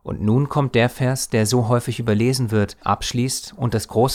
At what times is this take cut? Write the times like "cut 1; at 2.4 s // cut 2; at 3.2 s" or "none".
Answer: cut 1; at 2.8 s